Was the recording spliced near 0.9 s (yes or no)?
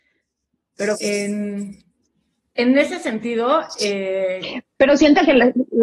yes